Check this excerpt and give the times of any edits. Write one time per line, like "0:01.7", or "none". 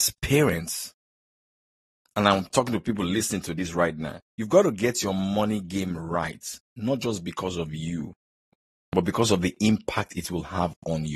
0:04.3